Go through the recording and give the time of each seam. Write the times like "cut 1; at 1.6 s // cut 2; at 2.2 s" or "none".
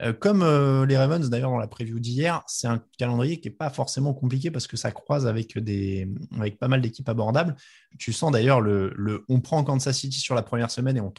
cut 1; at 7.9 s